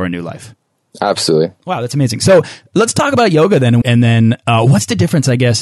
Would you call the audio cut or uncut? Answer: cut